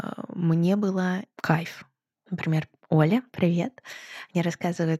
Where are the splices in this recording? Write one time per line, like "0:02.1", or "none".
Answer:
0:02.1